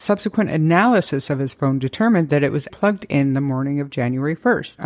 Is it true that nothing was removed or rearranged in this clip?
no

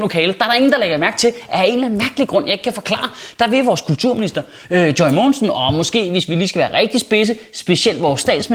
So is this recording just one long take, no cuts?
yes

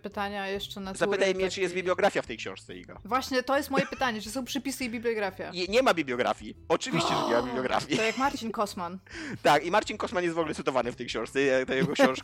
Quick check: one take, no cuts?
yes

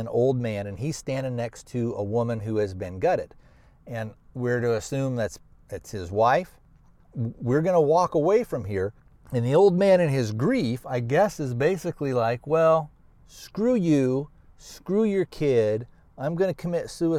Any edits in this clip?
yes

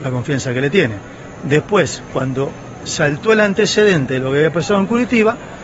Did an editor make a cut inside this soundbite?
yes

